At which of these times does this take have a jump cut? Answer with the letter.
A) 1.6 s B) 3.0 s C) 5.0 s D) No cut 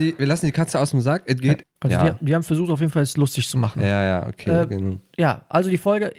A